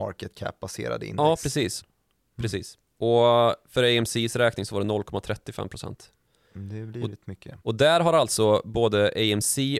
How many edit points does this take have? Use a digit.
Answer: 2